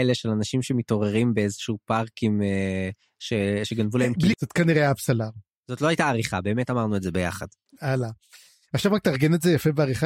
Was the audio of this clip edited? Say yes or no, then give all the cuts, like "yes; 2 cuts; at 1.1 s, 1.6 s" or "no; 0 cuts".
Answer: yes; 1 cut; at 4.3 s